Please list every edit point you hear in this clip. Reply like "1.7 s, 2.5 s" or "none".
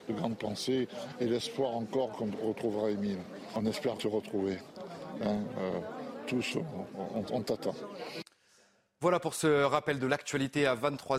4.0 s